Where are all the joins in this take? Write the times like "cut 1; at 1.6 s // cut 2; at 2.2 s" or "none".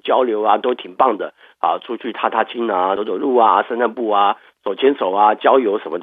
cut 1; at 3.0 s